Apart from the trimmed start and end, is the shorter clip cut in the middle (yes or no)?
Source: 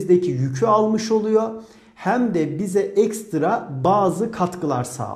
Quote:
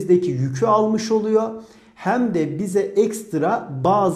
no